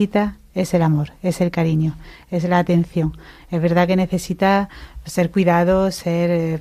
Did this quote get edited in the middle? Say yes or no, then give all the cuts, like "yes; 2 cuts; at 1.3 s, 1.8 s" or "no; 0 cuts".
no; 0 cuts